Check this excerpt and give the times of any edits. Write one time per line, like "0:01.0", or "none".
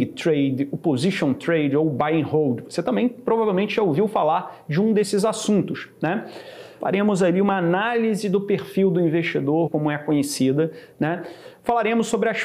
0:06.8
0:09.7

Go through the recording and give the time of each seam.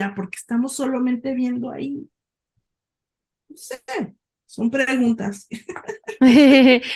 none

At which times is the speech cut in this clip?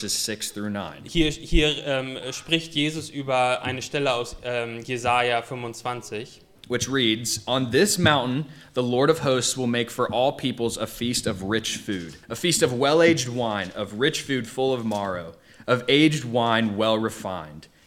0:12.2

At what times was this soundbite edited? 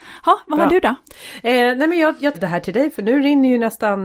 0:02.3

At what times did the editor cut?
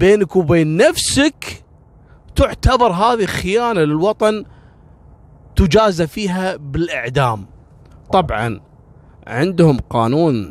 none

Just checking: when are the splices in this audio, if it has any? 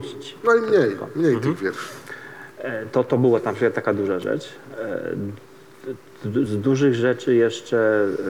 0:06.5

